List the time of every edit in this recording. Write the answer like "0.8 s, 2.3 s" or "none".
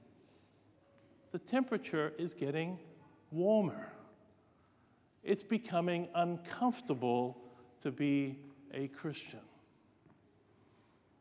none